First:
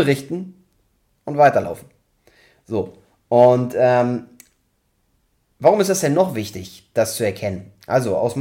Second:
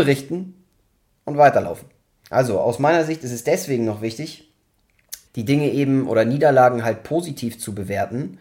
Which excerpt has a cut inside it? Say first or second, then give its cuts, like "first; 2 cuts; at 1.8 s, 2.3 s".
second; 2 cuts; at 2.2 s, 5.3 s